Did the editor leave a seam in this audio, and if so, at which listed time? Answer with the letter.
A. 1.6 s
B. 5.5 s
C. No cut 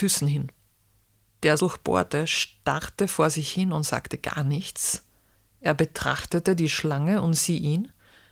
A